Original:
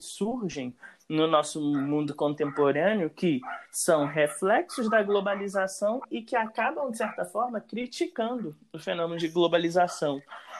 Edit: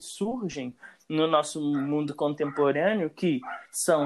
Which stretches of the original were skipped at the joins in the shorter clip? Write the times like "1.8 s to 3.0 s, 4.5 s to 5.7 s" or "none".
none